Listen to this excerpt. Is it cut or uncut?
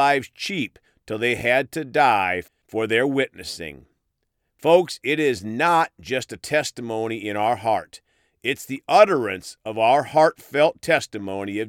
uncut